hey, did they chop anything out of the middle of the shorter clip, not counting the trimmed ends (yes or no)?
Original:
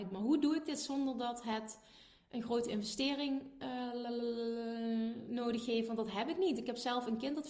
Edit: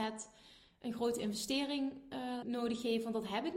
yes